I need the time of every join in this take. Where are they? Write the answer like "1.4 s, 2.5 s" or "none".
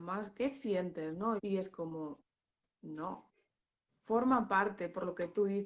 1.4 s, 3.9 s